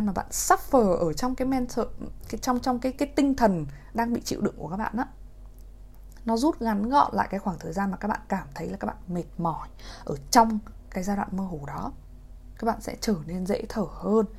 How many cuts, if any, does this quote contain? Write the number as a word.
one